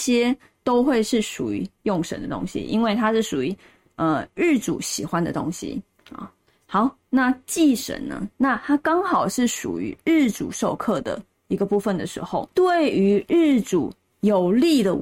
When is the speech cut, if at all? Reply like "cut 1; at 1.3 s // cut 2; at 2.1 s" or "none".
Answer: cut 1; at 8.3 s // cut 2; at 12.5 s